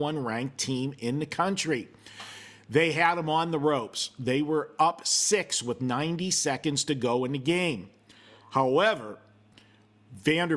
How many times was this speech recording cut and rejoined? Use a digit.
0